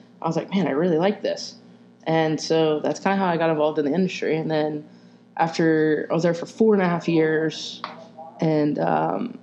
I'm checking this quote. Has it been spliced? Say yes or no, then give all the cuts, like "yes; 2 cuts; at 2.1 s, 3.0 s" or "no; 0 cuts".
no; 0 cuts